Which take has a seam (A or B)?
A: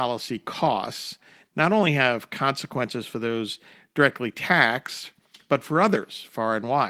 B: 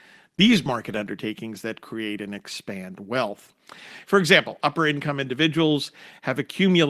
B